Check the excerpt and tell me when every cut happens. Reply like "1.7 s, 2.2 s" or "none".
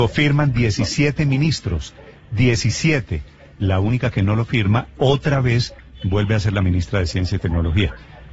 none